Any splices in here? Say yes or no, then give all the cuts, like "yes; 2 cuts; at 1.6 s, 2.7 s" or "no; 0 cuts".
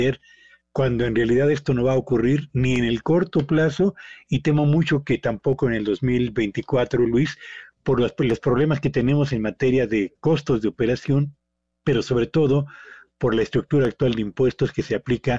no; 0 cuts